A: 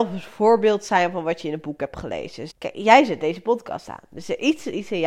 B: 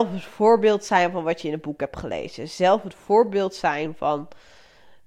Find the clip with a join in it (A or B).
A